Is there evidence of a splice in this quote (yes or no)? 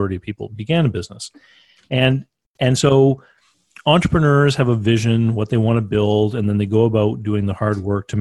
no